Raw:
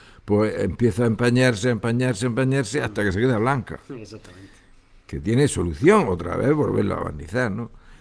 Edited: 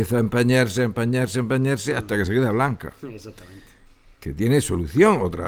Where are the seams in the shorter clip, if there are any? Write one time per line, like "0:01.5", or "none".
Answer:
none